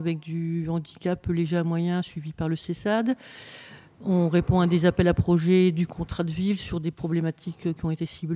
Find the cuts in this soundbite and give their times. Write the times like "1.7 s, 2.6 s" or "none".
none